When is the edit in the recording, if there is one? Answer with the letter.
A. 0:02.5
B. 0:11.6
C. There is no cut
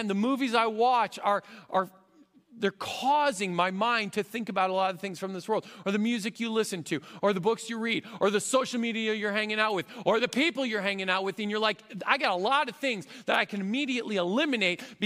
C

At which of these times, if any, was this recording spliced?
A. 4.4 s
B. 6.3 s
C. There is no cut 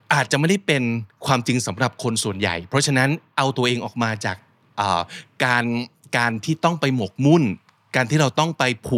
C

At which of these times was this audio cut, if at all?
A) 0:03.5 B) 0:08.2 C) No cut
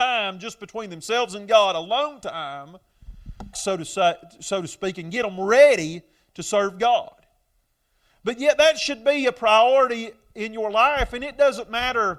A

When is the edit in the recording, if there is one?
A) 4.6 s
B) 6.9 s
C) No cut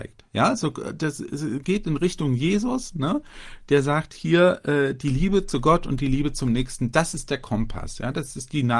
C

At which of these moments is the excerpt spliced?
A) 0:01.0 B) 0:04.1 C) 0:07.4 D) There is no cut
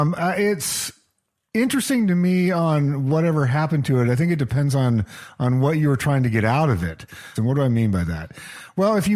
C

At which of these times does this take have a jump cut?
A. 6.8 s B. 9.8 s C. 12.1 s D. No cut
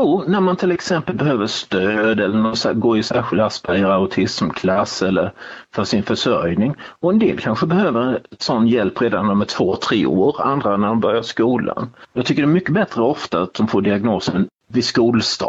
C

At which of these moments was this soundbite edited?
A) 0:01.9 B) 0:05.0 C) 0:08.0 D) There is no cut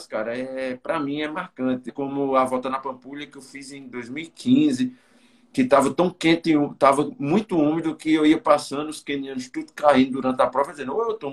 A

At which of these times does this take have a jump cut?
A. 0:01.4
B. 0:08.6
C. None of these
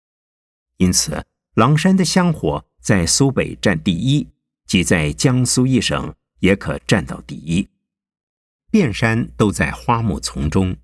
B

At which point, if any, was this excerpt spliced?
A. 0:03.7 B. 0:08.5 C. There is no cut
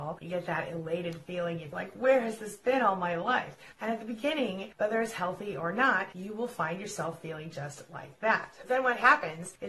A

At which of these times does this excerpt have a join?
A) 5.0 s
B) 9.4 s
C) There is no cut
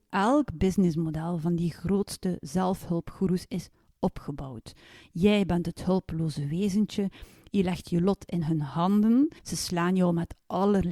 B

